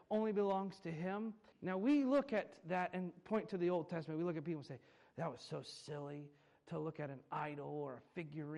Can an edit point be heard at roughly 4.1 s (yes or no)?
no